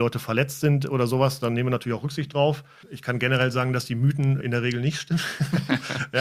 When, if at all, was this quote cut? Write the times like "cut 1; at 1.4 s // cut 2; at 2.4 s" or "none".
cut 1; at 2.8 s // cut 2; at 4.4 s